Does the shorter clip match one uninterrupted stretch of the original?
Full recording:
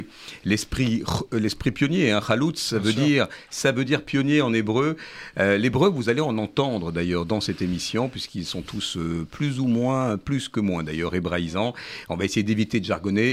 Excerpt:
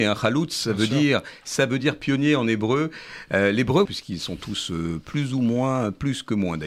no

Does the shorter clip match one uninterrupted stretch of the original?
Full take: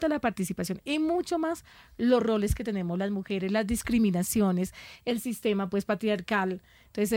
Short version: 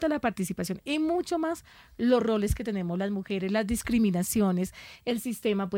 yes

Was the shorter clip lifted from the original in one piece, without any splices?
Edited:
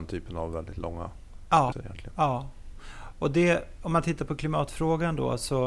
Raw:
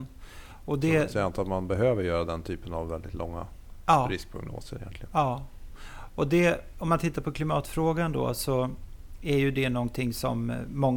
no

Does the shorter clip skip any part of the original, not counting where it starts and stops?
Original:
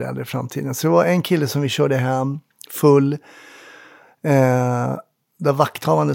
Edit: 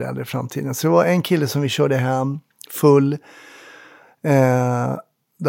no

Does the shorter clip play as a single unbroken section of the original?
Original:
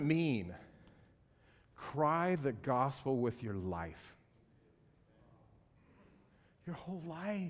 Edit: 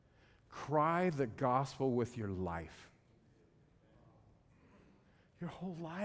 yes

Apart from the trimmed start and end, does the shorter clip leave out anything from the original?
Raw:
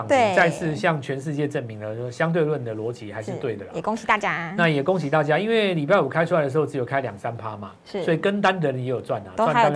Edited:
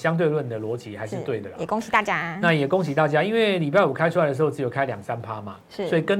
no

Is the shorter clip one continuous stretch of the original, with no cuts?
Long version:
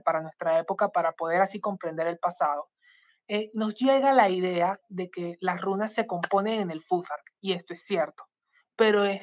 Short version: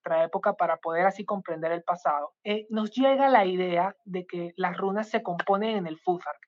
no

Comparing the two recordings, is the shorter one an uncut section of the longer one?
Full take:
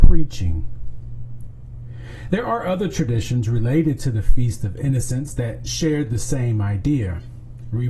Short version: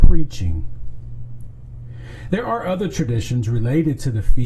yes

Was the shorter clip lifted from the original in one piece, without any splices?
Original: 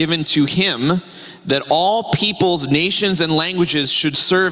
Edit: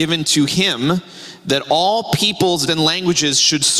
no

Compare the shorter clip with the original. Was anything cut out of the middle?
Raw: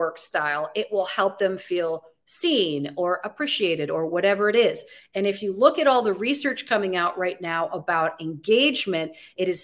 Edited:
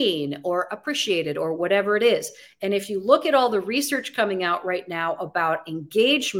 no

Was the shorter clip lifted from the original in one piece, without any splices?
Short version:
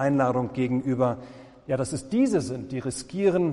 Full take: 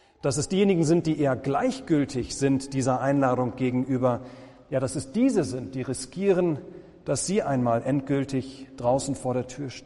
yes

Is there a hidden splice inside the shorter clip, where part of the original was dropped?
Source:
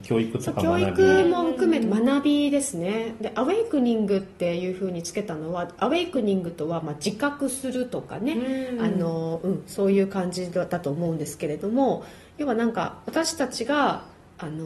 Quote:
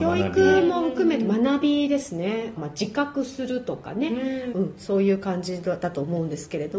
yes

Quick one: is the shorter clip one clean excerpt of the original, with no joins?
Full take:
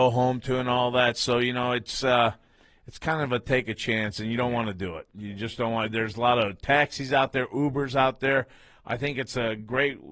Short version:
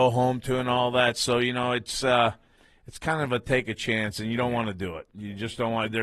yes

